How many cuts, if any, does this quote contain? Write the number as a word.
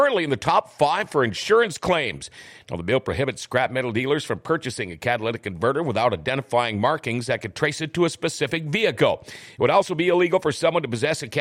one